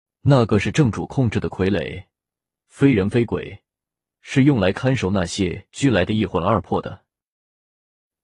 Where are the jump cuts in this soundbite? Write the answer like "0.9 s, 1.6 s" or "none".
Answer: none